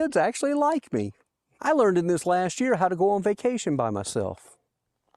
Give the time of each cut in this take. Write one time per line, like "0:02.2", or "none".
0:01.6